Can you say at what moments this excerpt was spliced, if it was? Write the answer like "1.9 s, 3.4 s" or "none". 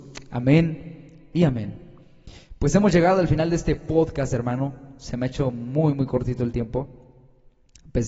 none